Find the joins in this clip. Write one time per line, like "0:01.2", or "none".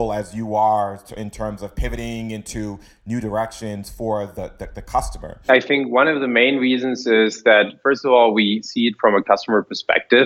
0:05.5